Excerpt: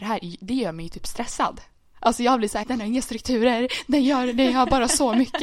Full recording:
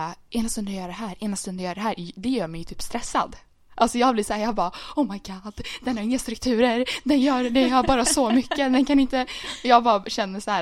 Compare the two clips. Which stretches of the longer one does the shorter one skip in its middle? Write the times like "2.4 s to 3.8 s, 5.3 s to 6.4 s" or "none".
4.4 s to 5.8 s